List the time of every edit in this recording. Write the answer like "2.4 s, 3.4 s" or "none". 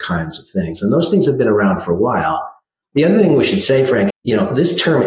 4.1 s